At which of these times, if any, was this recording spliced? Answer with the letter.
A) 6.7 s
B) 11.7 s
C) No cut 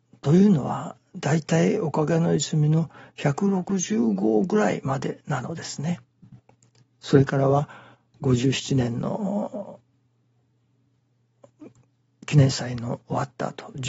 C